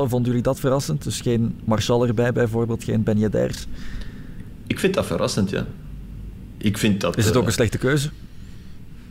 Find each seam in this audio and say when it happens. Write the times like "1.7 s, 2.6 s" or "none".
6.5 s